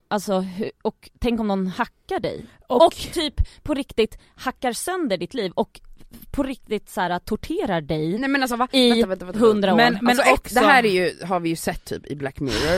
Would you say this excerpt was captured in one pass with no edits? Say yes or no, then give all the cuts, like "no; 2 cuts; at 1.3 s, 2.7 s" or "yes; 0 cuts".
yes; 0 cuts